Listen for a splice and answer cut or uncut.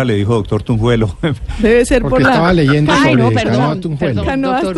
uncut